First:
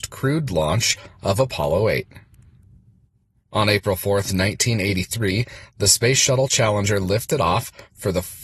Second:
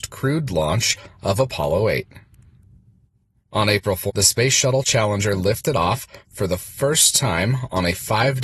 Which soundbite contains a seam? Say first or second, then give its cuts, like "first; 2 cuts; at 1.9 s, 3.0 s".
second; 1 cut; at 4.1 s